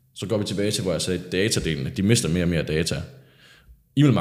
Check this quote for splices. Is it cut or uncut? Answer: uncut